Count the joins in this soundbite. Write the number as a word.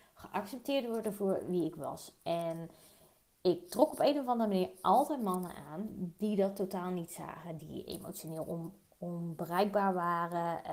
zero